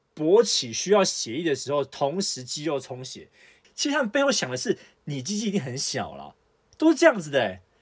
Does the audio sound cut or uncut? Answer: cut